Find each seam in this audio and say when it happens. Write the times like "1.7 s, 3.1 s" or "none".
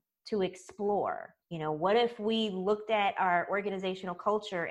1.4 s